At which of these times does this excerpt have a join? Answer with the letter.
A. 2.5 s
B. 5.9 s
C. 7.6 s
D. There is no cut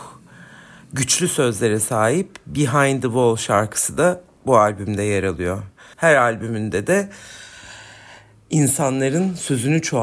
B